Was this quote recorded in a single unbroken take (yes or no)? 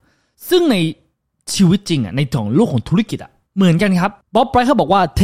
yes